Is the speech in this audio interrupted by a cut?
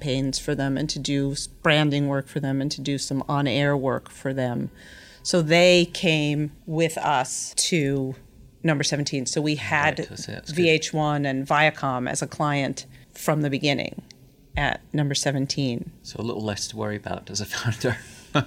no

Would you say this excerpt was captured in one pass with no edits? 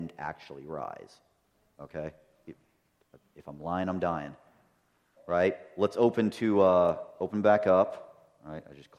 no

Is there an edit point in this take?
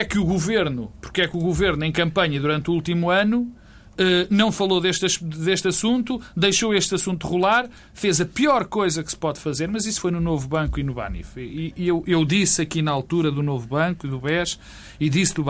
no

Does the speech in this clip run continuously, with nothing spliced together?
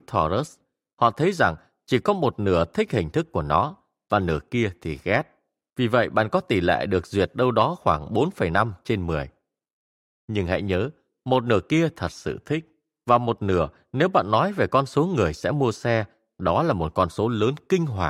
yes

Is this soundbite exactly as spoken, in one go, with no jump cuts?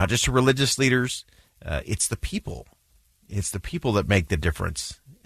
yes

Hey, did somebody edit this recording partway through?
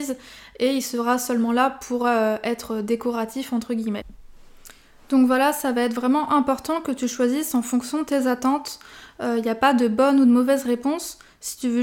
no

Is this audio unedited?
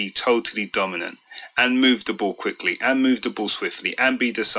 yes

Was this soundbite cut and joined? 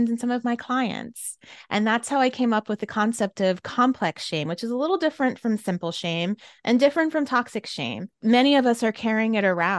no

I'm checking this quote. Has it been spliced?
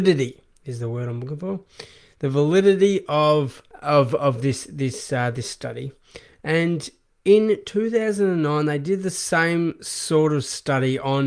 no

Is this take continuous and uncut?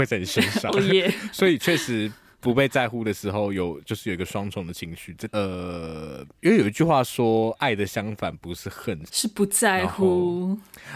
no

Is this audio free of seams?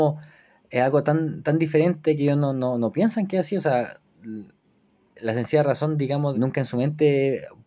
no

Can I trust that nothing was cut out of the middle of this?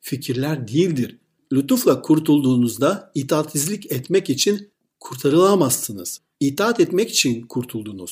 yes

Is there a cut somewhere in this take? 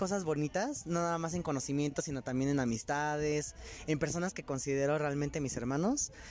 no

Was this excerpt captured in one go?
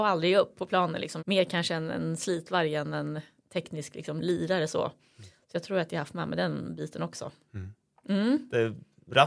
no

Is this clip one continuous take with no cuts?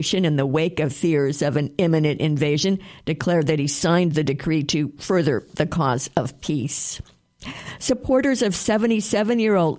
yes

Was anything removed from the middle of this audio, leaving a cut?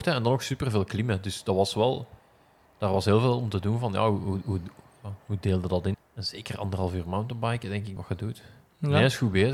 yes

